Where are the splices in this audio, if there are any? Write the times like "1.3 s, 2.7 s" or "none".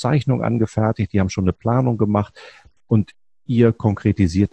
none